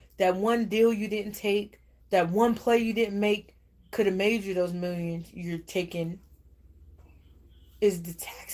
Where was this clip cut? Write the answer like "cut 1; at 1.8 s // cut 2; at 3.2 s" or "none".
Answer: cut 1; at 2.0 s